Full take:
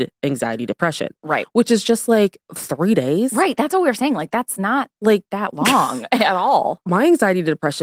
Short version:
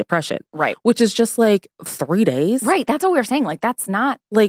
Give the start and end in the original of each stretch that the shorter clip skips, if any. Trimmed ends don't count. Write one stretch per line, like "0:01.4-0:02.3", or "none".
none